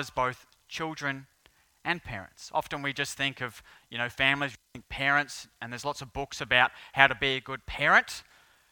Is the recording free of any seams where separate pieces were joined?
yes; 0 cuts

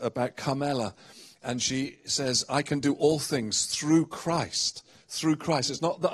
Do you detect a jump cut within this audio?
no; 0 cuts

